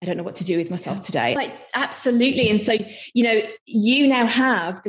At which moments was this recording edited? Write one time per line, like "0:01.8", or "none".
0:01.4